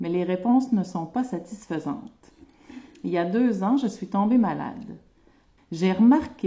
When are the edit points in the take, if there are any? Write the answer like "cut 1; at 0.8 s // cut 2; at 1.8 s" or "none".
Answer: cut 1; at 5.6 s